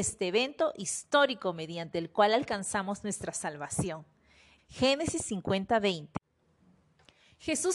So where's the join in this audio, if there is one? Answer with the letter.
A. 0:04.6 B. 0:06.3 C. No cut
A